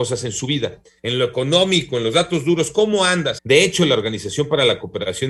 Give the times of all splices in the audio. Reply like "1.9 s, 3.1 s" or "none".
1.0 s, 3.4 s